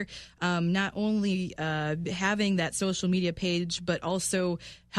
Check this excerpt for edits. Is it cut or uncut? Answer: uncut